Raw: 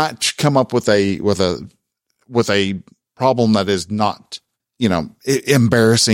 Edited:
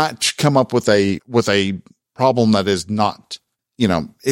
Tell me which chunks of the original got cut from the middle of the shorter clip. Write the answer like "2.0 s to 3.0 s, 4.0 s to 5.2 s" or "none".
1.2 s to 2.2 s